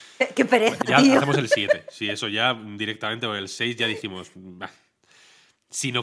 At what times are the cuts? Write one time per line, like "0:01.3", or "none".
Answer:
none